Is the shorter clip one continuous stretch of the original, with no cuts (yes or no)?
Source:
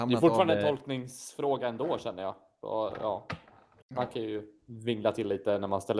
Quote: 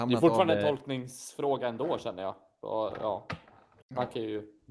yes